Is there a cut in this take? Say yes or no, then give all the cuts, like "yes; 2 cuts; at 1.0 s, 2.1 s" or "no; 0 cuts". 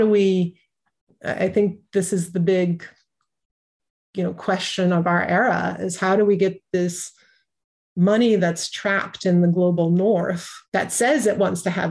yes; 1 cut; at 10.7 s